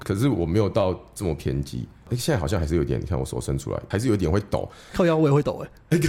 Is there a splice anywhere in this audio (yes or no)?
yes